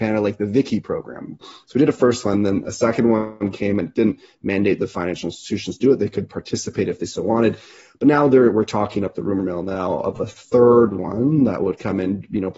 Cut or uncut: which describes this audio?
cut